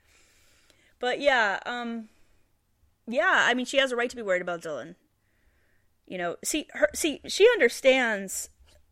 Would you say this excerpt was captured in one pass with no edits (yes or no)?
yes